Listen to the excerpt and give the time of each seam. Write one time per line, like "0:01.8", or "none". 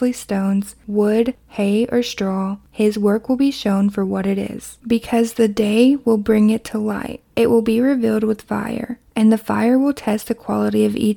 none